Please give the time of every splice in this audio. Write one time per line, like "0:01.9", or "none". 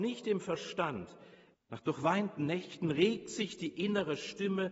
0:01.5